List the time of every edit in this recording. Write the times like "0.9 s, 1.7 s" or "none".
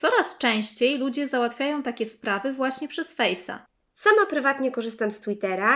3.9 s